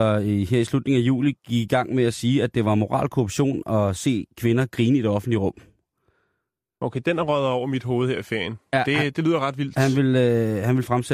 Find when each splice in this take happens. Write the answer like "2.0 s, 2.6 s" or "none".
none